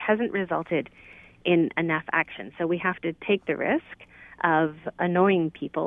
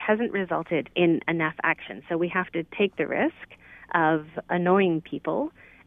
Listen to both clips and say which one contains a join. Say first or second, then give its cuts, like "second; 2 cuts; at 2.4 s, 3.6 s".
second; 1 cut; at 0.9 s